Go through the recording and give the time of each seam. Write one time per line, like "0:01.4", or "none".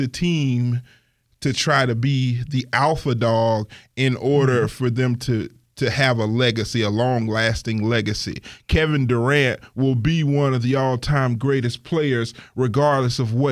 none